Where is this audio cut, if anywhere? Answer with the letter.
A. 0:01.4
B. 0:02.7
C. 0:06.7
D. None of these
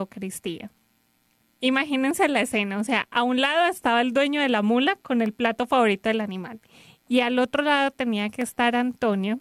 A